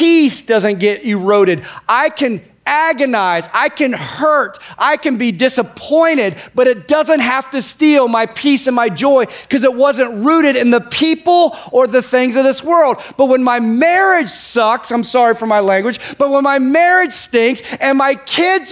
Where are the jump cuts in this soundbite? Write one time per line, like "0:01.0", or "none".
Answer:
none